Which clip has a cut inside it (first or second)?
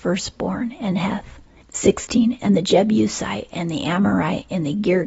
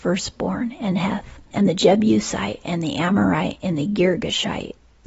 second